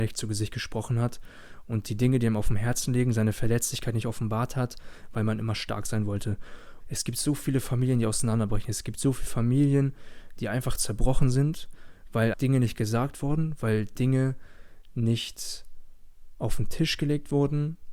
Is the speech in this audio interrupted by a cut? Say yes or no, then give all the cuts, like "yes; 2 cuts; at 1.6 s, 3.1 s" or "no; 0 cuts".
yes; 2 cuts; at 6.8 s, 12.3 s